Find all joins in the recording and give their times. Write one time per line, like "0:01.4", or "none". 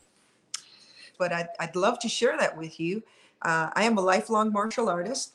0:01.1